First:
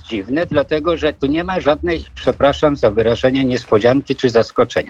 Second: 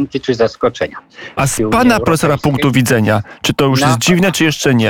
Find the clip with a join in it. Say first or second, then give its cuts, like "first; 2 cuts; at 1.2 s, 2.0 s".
second; 1 cut; at 1.4 s